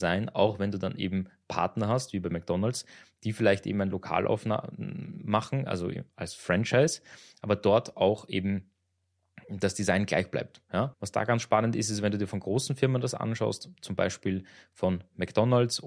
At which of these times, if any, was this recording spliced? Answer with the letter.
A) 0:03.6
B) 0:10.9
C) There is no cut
B